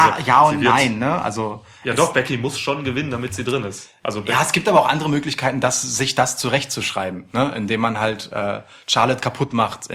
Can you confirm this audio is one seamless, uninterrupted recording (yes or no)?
yes